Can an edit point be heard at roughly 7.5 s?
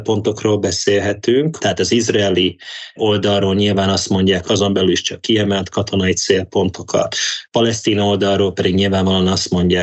no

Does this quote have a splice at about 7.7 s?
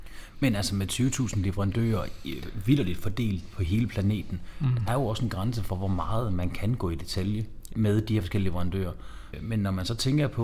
yes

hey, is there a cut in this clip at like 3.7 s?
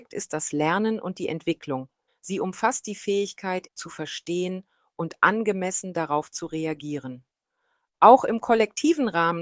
yes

